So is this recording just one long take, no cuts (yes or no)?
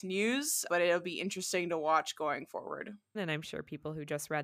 no